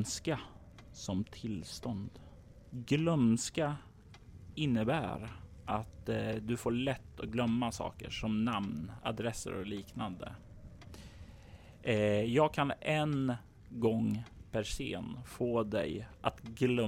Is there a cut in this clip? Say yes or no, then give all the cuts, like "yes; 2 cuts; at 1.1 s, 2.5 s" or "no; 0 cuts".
no; 0 cuts